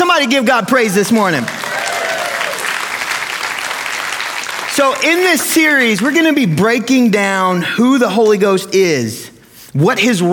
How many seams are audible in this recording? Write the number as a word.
zero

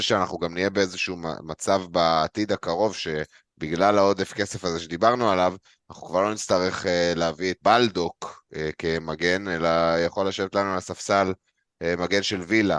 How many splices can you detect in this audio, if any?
one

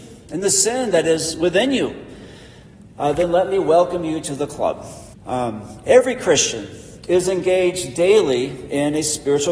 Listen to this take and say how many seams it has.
one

